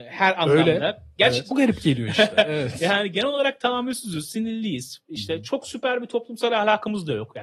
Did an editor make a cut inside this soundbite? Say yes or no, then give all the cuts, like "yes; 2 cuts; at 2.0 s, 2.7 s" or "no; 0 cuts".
yes; 1 cut; at 1.5 s